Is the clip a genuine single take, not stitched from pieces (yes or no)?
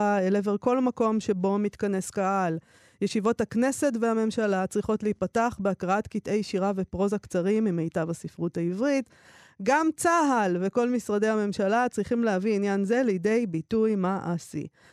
yes